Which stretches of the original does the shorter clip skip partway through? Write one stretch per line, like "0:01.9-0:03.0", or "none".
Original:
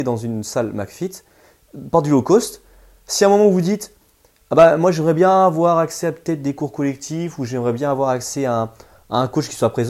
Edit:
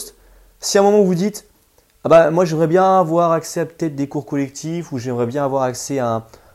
none

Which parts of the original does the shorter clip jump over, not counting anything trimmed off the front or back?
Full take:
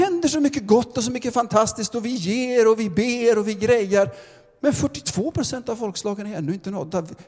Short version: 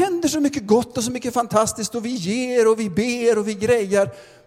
none

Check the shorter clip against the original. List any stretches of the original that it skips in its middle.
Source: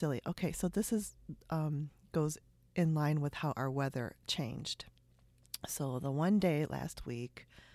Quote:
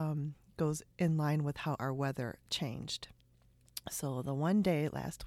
0:02.5-0:02.7

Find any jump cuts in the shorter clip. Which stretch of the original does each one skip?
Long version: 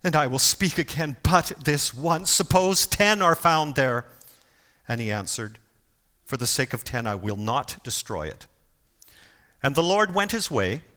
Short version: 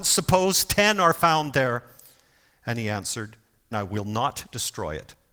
0:05.9-0:07.0

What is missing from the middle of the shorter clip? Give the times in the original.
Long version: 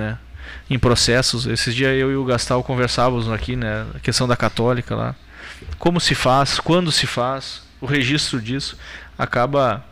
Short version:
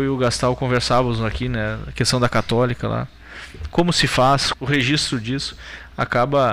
0:06.6-0:07.7

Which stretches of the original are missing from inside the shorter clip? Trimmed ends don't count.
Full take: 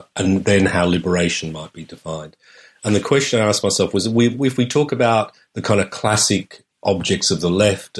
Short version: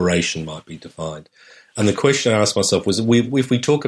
none

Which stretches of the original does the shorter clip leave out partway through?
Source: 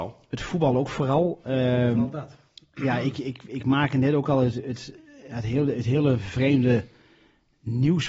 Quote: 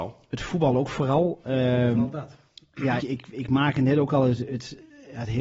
0:03.0-0:03.2

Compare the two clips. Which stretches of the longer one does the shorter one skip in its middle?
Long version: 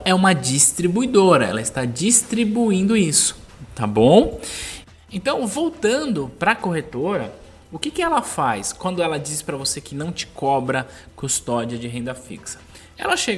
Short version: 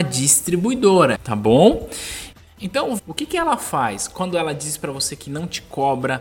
0:01.5-0:03.7
0:05.5-0:07.6

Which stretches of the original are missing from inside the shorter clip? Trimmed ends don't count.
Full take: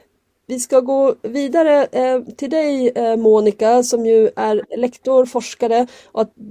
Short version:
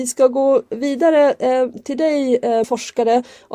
0:03.2-0:05.3

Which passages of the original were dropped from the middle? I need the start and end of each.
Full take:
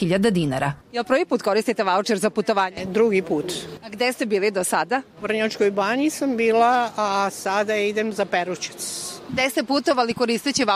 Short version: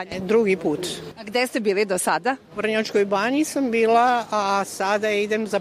none

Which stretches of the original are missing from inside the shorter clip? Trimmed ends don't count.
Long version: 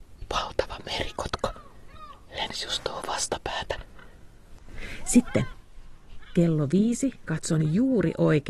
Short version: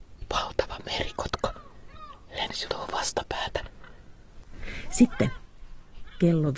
0:02.7-0:02.8

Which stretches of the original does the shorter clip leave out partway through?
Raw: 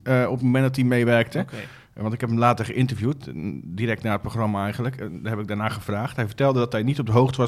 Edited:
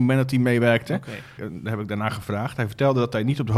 0:01.8-0:05.0

